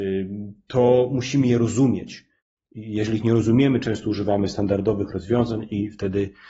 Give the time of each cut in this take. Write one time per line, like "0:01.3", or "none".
none